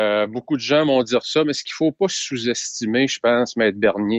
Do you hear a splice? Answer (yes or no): no